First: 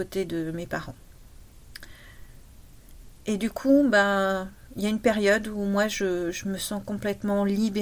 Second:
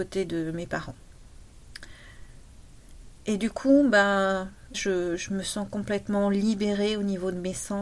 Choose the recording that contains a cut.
second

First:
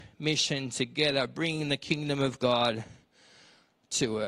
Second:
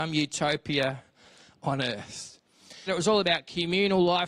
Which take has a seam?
second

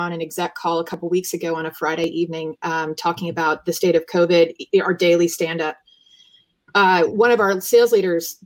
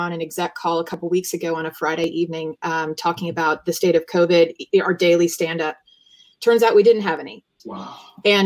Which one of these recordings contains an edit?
second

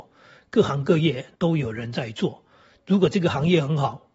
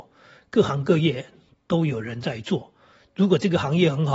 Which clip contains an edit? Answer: first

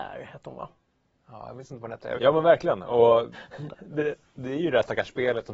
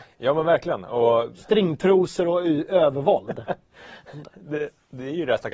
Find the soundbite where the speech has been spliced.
first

